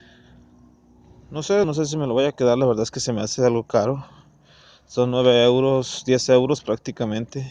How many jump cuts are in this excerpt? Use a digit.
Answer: 1